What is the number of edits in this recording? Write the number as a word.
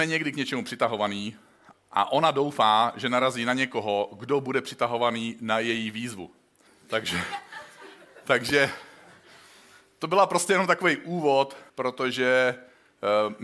three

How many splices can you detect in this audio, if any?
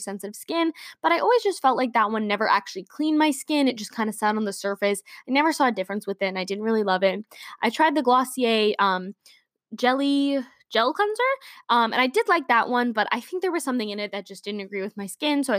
zero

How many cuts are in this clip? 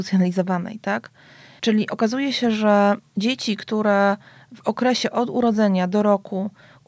one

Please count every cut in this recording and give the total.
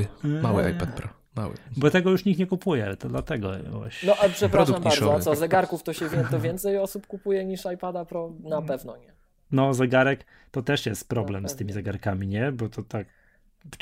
zero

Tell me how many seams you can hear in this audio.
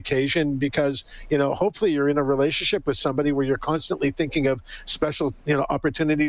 zero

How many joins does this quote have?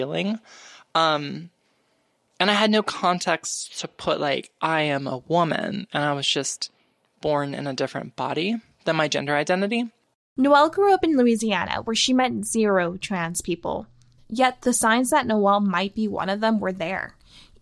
two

